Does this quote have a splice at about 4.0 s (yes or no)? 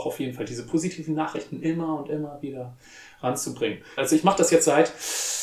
yes